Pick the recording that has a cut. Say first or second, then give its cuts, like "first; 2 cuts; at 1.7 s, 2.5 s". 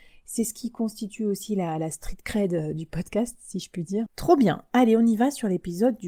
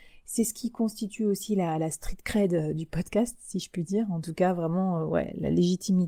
first; 1 cut; at 4.1 s